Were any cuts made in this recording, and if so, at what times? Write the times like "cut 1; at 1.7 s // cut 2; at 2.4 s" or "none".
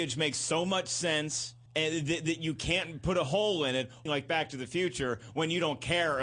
cut 1; at 1.7 s // cut 2; at 4.1 s